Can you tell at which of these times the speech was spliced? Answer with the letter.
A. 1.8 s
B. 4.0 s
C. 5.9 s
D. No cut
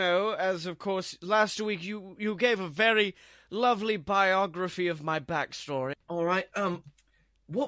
C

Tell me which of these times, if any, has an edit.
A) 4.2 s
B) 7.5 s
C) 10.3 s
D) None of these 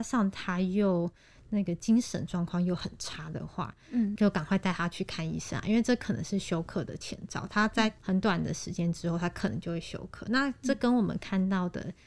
A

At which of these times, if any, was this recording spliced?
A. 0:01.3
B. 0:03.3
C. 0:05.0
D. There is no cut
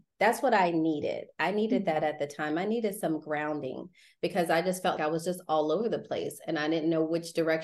C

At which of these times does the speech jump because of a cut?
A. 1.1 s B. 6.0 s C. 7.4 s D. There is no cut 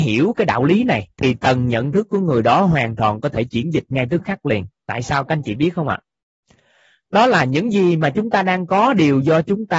A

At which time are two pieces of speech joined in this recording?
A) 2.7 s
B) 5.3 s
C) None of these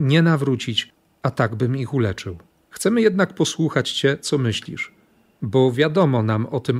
A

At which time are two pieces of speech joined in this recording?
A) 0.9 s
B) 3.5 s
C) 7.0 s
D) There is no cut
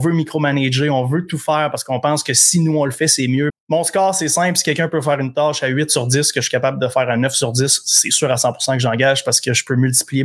B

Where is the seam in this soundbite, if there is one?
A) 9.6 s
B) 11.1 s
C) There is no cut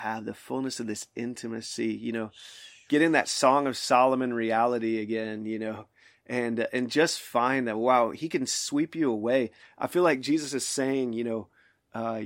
A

